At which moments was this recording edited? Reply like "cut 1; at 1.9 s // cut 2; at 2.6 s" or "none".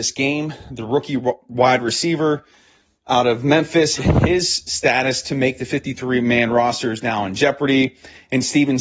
cut 1; at 4.0 s